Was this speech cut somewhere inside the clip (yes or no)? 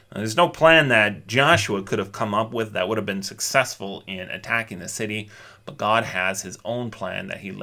no